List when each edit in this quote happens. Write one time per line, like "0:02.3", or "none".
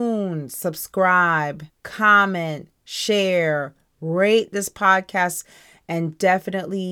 0:01.7